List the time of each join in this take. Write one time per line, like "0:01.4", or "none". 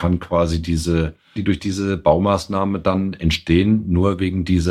0:01.4